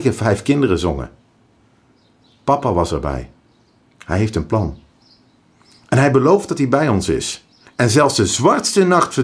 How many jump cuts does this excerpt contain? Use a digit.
2